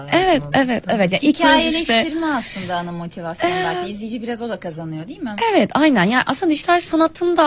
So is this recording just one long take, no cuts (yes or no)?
yes